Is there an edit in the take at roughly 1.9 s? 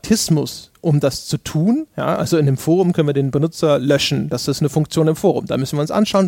no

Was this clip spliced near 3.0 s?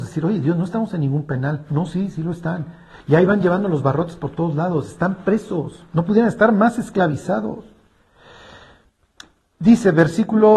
no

